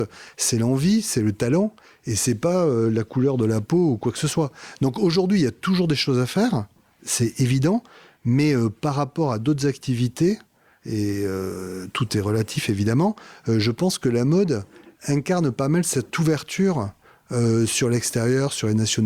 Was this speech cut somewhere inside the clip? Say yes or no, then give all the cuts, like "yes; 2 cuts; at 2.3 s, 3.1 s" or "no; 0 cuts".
no; 0 cuts